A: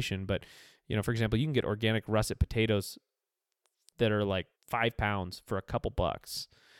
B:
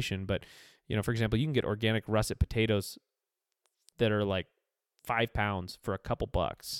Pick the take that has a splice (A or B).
A